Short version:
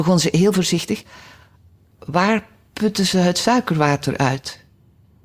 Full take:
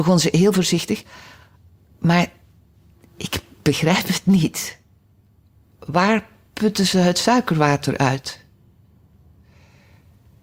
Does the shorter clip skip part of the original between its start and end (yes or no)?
yes